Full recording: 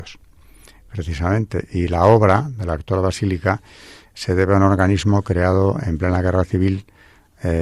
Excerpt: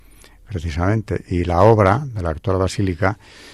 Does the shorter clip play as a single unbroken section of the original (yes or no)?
yes